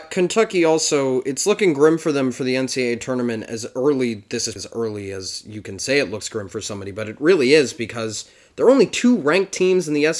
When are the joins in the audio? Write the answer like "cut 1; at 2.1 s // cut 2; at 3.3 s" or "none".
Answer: cut 1; at 4.6 s